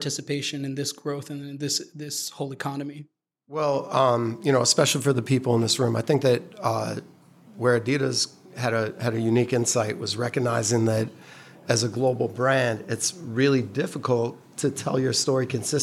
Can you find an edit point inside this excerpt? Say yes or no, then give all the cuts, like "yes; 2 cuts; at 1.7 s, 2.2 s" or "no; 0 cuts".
no; 0 cuts